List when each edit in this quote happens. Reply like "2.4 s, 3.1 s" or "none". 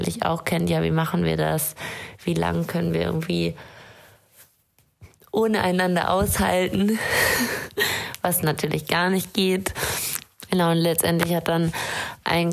10.5 s